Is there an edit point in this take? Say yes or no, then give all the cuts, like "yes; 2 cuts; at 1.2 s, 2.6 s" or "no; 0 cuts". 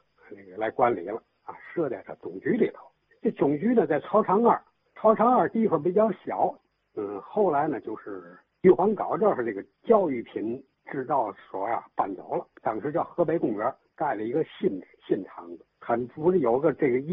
yes; 2 cuts; at 12.5 s, 15.8 s